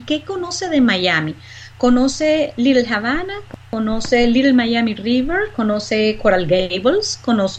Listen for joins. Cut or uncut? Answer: uncut